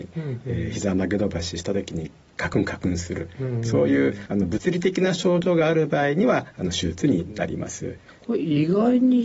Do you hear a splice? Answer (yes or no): no